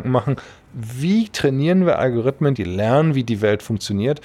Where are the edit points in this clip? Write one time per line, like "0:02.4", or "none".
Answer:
0:02.6